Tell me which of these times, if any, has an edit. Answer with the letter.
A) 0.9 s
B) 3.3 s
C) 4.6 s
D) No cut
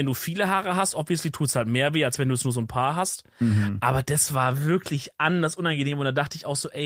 D